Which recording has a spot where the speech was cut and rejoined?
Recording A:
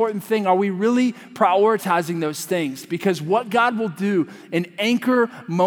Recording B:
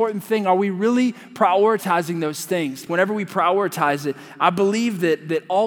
B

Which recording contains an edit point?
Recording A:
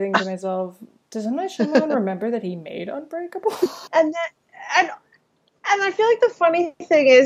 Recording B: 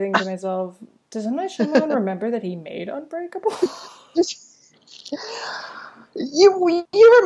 A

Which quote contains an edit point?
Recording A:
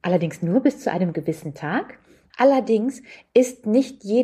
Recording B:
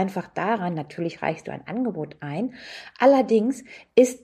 A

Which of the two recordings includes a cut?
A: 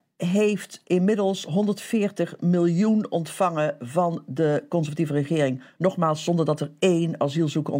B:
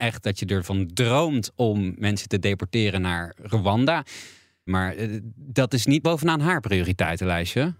B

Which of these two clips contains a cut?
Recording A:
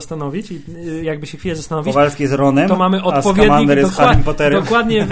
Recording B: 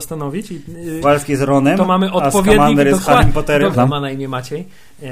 B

